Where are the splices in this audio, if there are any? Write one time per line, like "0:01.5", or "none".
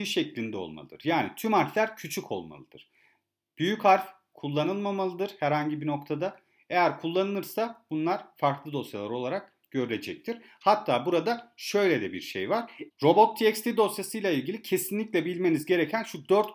0:12.9